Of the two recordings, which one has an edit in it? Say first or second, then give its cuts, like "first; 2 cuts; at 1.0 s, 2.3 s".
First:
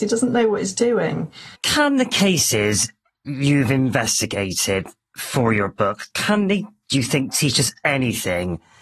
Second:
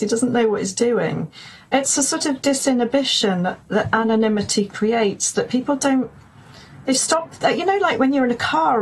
first; 2 cuts; at 1.5 s, 6.1 s